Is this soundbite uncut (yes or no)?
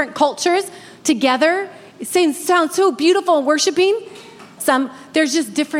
no